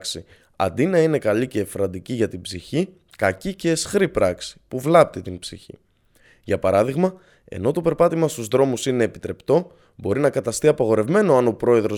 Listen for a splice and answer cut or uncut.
uncut